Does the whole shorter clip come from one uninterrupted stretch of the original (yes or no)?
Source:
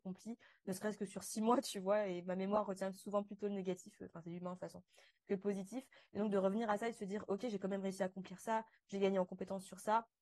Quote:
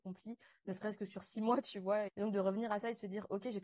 no